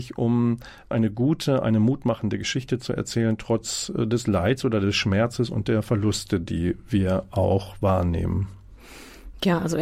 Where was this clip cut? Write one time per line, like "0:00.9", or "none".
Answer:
0:00.9